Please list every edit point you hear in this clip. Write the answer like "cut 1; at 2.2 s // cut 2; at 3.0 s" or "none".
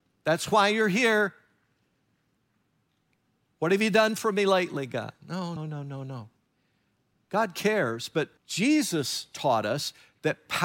cut 1; at 5.6 s // cut 2; at 8.4 s